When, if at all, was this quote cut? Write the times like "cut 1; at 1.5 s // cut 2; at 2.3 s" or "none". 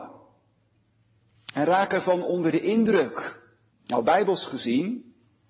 cut 1; at 3.7 s